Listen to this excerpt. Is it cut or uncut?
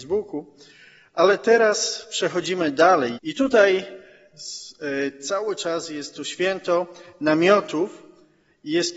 cut